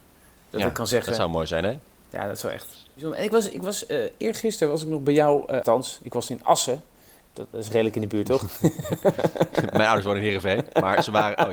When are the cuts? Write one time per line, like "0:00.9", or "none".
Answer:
0:05.6